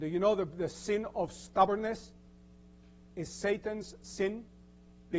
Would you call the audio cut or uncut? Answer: uncut